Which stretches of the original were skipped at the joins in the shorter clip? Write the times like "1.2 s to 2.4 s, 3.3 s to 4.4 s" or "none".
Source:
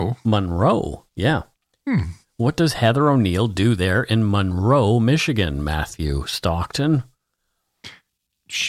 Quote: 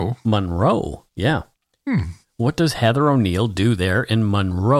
none